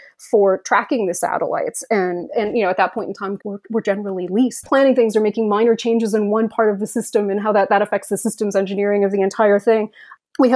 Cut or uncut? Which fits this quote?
cut